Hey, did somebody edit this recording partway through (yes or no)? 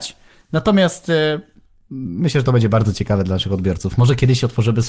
no